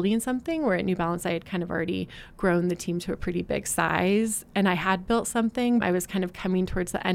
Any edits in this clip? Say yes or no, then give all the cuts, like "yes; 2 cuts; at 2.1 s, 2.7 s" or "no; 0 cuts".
yes; 1 cut; at 5.8 s